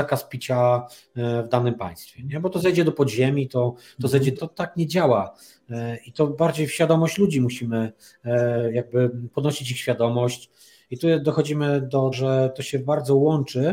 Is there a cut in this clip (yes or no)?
yes